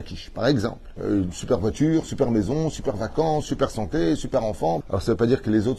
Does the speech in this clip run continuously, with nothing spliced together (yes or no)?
no